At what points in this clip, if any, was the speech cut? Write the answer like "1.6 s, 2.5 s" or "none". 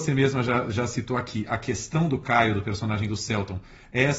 none